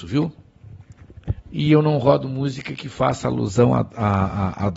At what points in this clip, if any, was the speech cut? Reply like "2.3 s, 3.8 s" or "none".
1.4 s